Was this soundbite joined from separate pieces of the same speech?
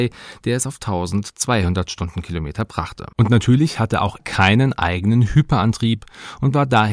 yes; 2 cuts; at 3.1 s, 4.2 s

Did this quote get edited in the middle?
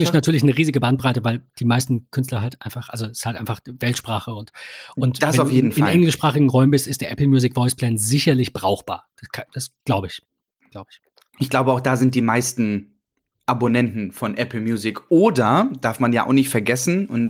no; 0 cuts

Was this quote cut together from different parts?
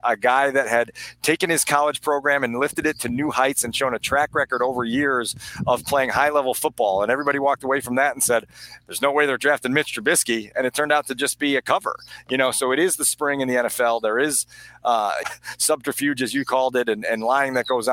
yes; 2 cuts; at 15.2 s, 17.0 s

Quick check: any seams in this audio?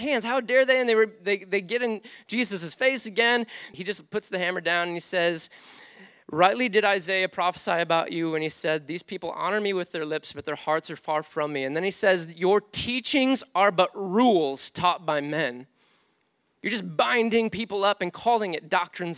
yes; 1 cut; at 3.7 s

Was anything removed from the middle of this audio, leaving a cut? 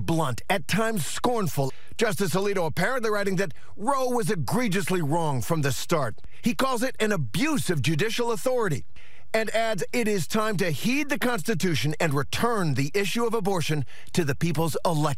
no; 0 cuts

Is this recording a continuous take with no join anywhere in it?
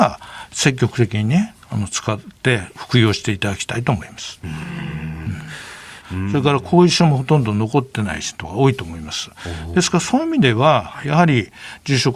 no; 1 cut; at 6.0 s

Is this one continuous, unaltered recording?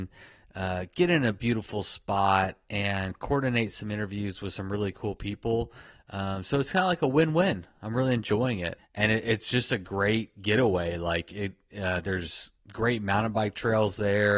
no; 1 cut; at 8.8 s

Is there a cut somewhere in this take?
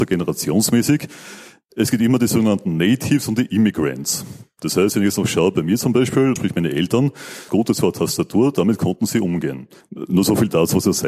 yes; 3 cuts; at 6.4 s, 7.5 s, 9.8 s

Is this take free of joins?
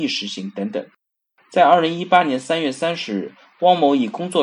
yes; 0 cuts

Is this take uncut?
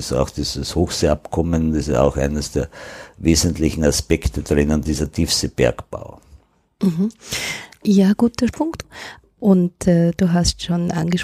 yes; 0 cuts

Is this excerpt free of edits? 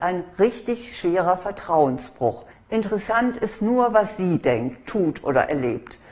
no; 1 cut; at 2.5 s

